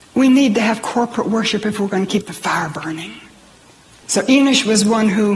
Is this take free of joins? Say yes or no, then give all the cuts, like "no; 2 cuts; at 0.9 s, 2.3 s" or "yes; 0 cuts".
yes; 0 cuts